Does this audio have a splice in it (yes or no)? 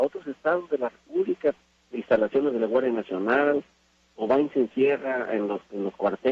yes